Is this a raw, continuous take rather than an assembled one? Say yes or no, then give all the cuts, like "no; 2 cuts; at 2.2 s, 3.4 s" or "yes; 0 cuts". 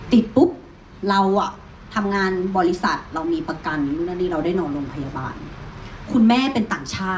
yes; 0 cuts